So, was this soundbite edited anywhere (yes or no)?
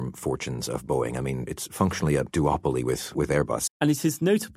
yes